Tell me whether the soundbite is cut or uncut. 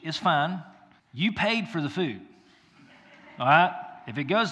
cut